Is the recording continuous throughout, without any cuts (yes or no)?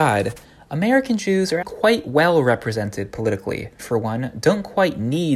no